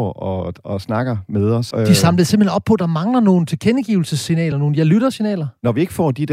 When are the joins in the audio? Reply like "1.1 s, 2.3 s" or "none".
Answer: 1.7 s, 4.5 s